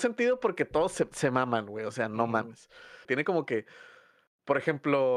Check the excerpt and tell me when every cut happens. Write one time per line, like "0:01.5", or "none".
0:03.0